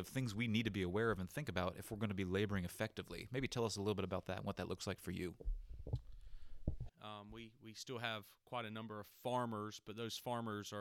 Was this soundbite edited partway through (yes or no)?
yes